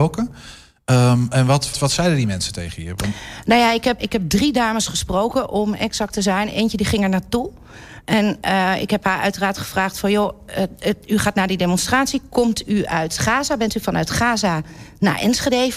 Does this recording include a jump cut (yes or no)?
yes